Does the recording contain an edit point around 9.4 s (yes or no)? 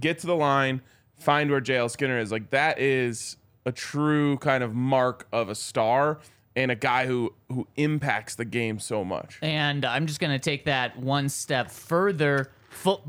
no